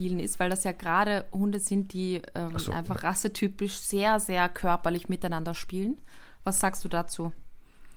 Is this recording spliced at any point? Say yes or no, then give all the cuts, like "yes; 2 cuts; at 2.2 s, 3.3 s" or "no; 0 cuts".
no; 0 cuts